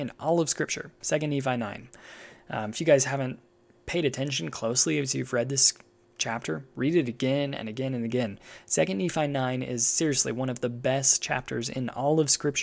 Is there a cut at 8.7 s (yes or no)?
no